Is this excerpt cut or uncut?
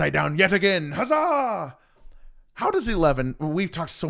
uncut